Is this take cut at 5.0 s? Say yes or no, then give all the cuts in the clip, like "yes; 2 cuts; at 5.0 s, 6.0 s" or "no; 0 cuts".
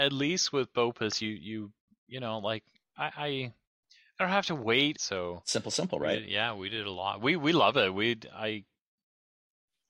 yes; 1 cut; at 5.0 s